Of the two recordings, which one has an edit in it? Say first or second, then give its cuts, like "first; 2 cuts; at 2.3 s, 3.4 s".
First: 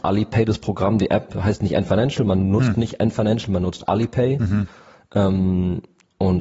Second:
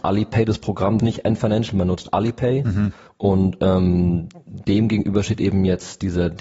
second; 2 cuts; at 1.0 s, 3.1 s